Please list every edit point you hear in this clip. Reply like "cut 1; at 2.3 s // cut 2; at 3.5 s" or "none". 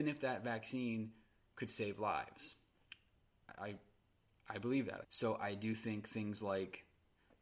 cut 1; at 5.0 s